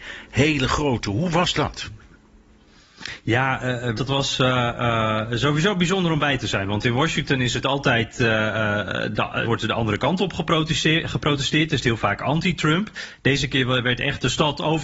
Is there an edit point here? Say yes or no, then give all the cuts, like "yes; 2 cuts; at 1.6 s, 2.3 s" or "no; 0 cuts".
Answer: yes; 2 cuts; at 4.0 s, 9.4 s